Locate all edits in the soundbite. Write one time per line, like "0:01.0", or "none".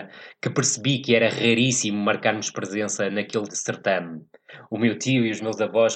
0:03.5